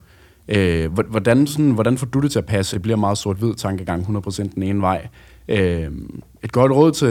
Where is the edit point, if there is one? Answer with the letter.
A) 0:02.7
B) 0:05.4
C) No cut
A